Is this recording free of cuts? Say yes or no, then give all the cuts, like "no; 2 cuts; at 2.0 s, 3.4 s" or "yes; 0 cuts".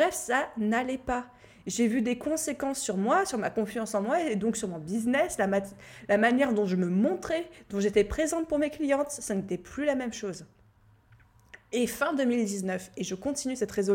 yes; 0 cuts